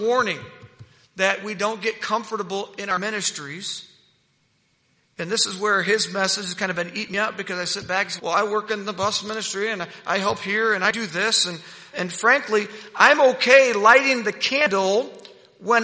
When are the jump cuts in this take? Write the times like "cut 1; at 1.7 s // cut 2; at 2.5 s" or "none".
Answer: cut 1; at 8.2 s // cut 2; at 11.9 s